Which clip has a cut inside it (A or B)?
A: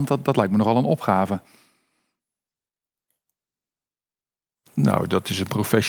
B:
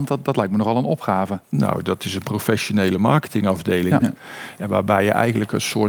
B